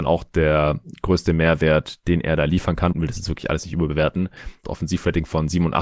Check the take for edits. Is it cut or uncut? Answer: cut